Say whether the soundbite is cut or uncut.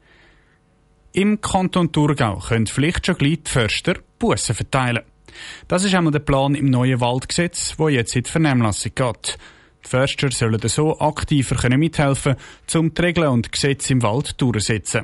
uncut